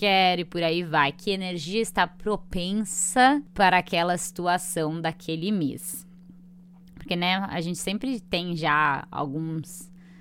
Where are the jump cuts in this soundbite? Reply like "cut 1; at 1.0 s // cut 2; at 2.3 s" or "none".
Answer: none